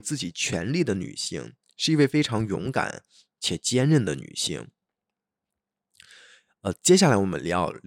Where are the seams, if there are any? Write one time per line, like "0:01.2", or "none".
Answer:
none